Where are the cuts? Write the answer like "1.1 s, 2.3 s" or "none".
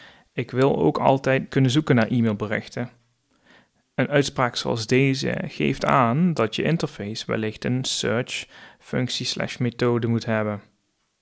1.5 s